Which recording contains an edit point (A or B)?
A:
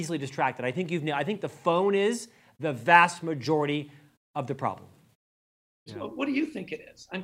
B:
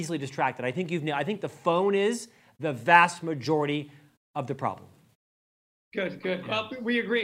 A